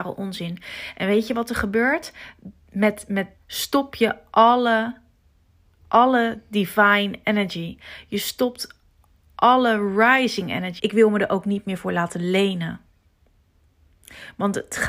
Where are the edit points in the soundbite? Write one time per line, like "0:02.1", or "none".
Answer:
0:03.4
0:10.8